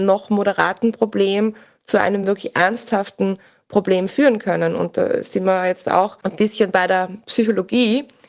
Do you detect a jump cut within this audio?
no; 0 cuts

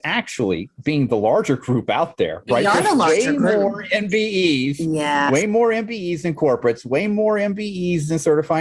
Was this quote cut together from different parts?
no; 0 cuts

